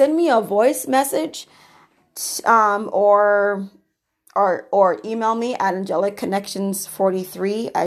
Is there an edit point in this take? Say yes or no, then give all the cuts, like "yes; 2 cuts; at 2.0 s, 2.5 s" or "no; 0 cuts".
no; 0 cuts